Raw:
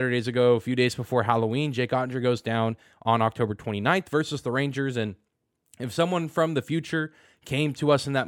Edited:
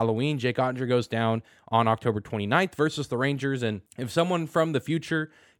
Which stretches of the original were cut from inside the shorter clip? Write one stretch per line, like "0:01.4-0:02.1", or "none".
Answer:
0:05.2-0:05.7